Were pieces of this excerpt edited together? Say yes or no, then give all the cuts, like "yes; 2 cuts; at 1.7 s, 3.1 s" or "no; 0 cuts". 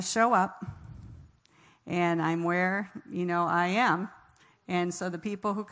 no; 0 cuts